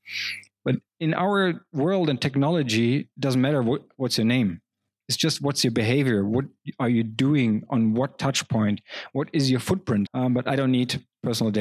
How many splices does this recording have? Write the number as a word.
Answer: one